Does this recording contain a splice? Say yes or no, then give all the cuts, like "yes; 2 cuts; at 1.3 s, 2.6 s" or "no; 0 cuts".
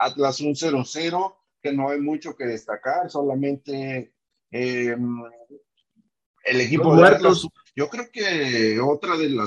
yes; 2 cuts; at 1.6 s, 7.7 s